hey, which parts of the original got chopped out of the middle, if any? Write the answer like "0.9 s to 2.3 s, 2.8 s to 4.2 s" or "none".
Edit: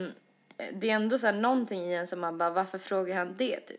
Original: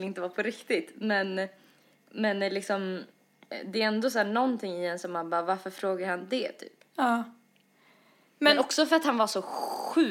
none